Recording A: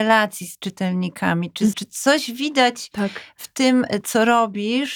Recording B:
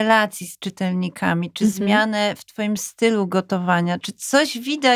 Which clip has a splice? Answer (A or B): A